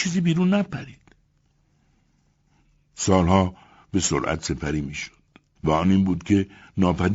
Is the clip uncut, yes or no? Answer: no